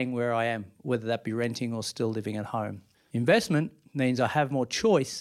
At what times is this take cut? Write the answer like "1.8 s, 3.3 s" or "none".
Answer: 2.9 s